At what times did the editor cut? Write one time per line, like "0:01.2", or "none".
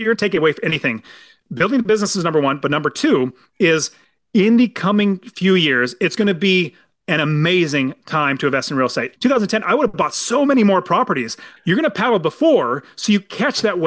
0:09.2
0:11.6